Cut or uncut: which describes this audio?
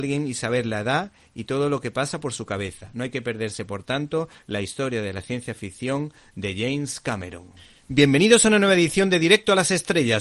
uncut